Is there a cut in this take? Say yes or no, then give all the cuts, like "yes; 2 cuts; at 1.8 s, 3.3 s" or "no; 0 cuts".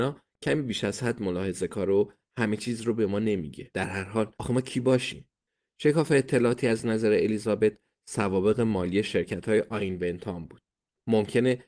no; 0 cuts